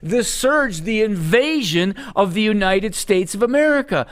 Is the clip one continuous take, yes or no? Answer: yes